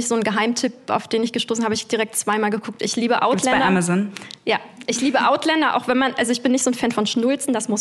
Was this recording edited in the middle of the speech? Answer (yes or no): no